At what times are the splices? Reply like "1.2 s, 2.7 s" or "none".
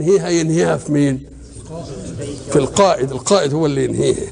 none